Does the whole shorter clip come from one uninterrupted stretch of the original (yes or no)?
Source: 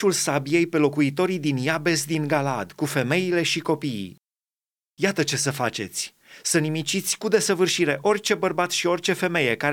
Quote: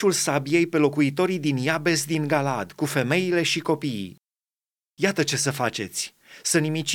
yes